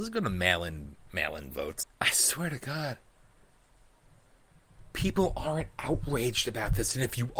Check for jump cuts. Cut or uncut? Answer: cut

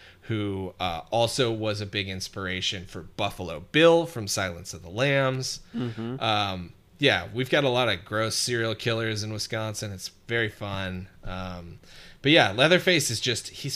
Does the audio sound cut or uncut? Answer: uncut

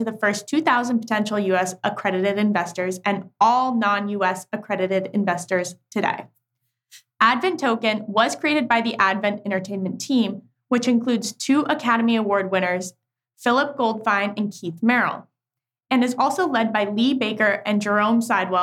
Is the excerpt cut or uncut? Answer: uncut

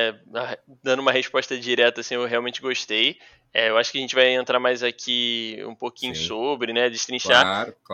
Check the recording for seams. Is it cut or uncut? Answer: uncut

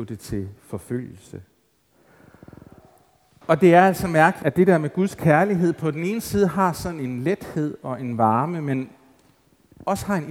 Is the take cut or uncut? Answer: cut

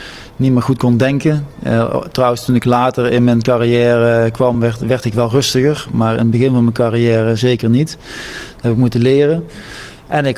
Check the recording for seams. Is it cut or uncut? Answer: uncut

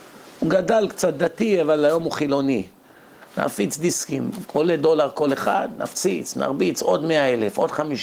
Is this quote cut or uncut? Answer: cut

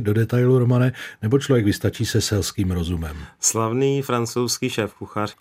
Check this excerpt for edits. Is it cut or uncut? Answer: uncut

